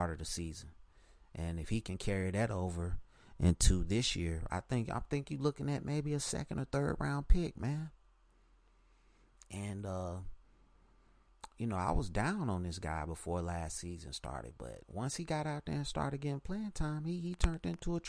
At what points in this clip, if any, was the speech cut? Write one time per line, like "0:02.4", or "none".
none

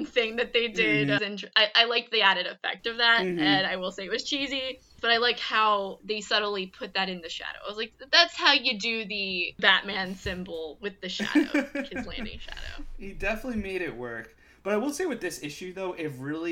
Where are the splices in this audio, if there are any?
0:01.2

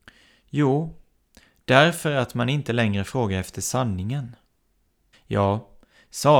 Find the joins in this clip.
0:05.1

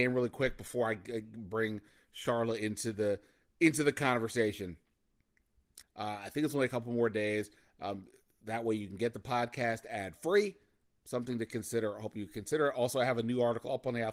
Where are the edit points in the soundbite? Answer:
0:05.8

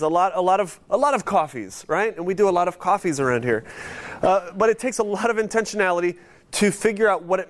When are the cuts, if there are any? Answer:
none

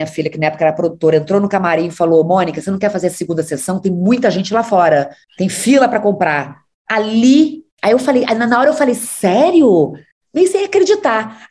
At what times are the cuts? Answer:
none

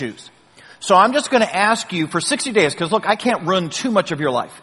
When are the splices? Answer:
none

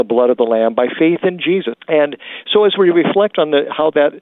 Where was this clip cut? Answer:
0:01.7

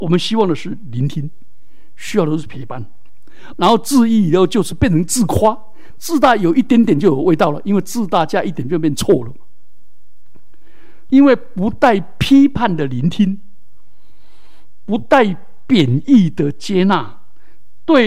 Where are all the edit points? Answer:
0:03.5
0:05.9
0:11.1

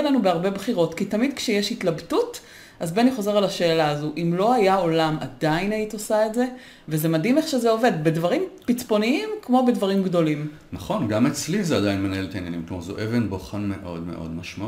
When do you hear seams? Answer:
none

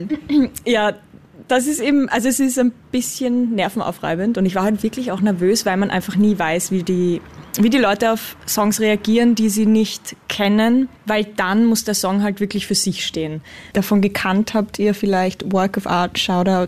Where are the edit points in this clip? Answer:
0:11.0
0:13.7

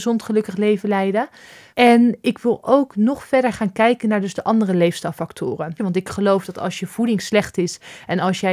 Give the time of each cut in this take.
0:01.7
0:05.8

